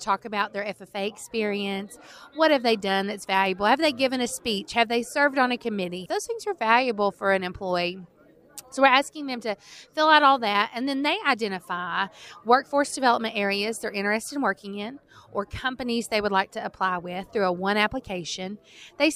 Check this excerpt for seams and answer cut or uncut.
cut